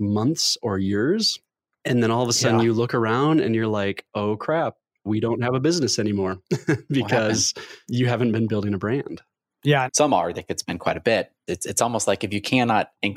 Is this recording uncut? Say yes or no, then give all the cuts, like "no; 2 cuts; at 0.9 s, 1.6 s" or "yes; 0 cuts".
no; 2 cuts; at 9.9 s, 11.5 s